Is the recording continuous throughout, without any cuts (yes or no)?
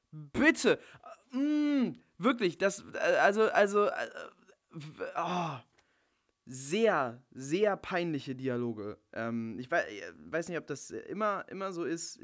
yes